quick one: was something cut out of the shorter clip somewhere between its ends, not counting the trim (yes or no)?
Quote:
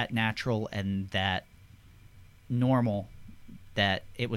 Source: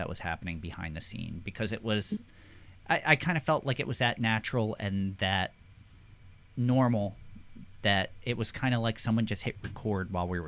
no